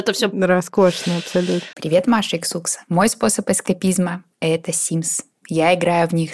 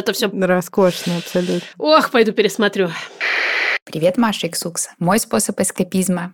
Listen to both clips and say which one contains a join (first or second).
first